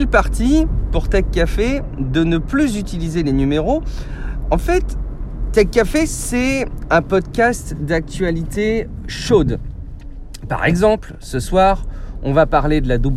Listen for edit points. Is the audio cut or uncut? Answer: uncut